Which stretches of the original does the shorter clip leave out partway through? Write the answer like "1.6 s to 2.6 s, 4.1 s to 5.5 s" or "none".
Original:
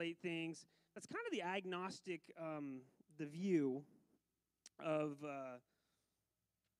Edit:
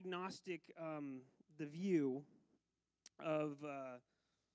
none